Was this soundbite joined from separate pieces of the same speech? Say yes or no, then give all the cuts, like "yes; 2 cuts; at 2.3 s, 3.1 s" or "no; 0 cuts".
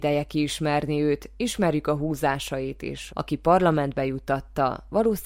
yes; 1 cut; at 3.1 s